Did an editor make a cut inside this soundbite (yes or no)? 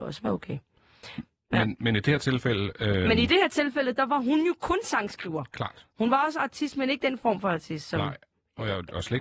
no